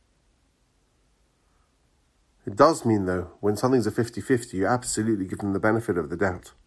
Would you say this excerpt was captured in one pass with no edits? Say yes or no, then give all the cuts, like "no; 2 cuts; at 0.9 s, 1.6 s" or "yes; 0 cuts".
yes; 0 cuts